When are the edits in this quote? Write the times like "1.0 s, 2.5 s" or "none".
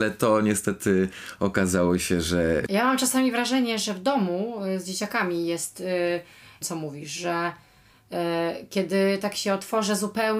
2.7 s, 6.6 s